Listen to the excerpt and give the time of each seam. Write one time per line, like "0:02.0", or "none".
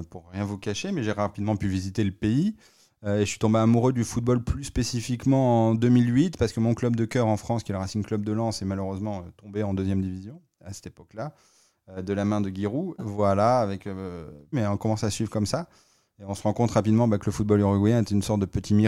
0:13.0
0:14.5